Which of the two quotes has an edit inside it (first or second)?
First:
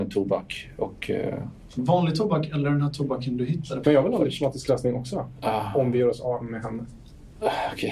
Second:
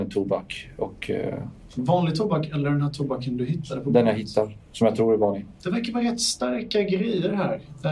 first